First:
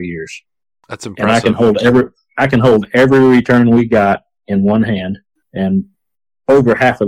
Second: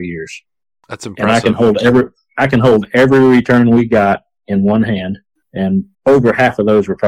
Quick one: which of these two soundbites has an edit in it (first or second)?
second